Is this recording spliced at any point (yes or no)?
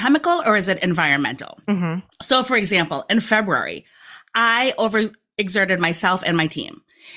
no